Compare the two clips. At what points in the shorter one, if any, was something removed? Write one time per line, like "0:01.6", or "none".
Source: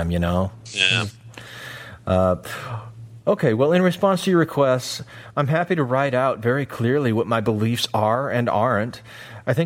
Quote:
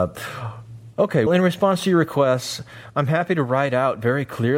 0:01.3

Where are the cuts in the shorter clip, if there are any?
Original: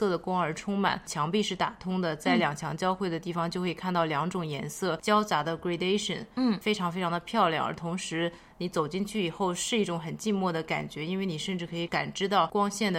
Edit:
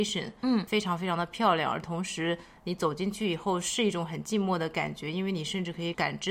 none

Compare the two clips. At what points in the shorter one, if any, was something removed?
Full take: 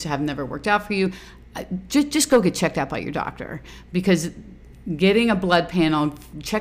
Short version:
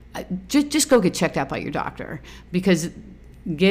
none

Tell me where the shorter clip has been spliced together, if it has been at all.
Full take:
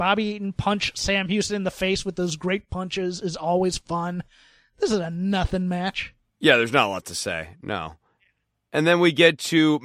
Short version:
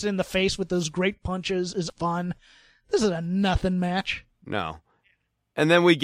0:01.9
0:04.4

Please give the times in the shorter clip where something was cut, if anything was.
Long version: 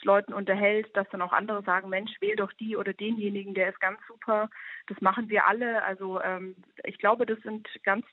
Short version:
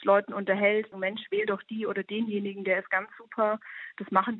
0:00.9

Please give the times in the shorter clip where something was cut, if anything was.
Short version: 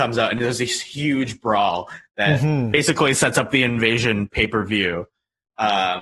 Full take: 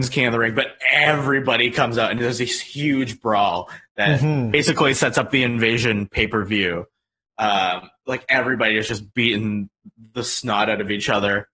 none

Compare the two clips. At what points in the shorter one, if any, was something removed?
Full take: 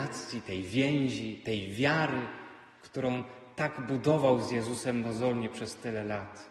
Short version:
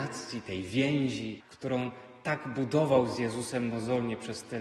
0:01.4

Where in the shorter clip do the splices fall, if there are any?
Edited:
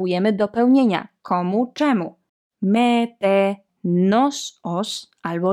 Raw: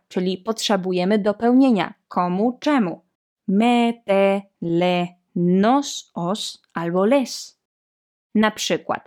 0:03.7

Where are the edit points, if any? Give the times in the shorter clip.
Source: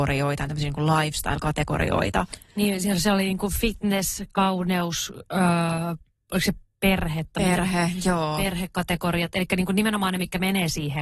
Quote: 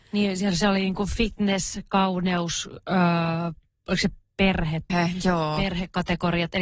0:04.9

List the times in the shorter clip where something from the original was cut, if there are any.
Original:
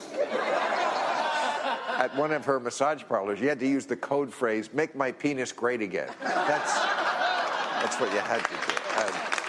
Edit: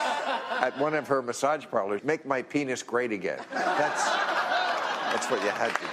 0:02.0

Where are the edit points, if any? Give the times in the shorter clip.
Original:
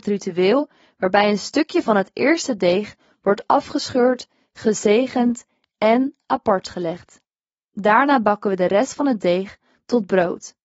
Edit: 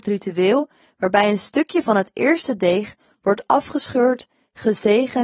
none

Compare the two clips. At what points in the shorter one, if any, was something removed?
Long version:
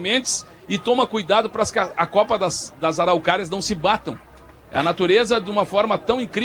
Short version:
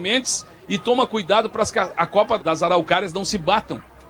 0:02.4

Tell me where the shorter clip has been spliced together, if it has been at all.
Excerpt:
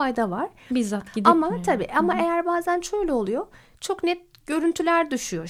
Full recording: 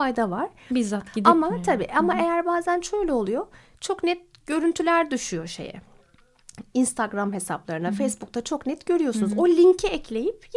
none

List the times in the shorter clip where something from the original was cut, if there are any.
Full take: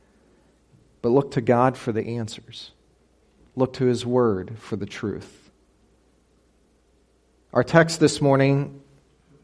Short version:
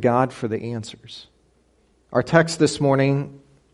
0:01.9

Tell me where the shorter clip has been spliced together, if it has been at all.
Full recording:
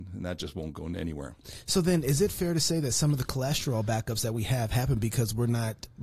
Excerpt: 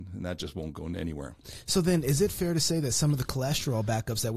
none

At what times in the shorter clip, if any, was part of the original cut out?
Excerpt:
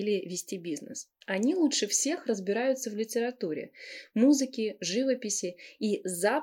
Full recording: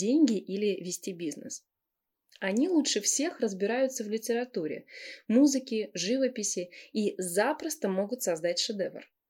0:01.2

